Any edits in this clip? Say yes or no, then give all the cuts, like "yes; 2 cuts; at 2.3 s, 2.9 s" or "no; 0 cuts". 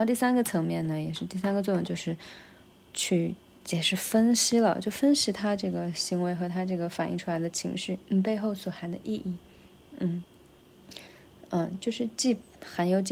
yes; 1 cut; at 8.0 s